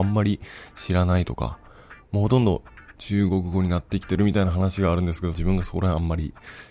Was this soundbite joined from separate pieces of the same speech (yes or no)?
yes